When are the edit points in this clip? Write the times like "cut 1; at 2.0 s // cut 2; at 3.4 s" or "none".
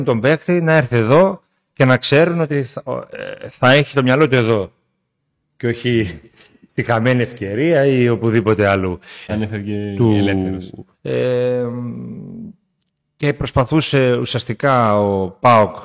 cut 1; at 9.3 s // cut 2; at 10.9 s